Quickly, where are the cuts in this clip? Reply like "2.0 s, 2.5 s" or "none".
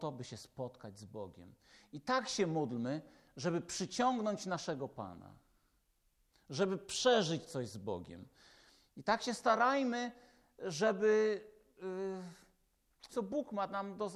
13.1 s